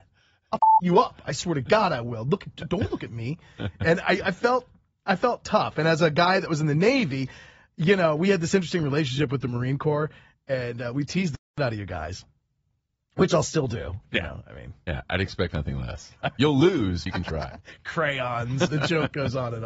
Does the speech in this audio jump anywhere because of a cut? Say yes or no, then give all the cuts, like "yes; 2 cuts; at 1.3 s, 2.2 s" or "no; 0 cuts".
yes; 2 cuts; at 17.1 s, 18.7 s